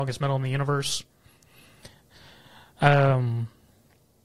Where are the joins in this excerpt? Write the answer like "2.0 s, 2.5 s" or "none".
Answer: none